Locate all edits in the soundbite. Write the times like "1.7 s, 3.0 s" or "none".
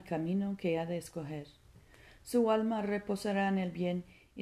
none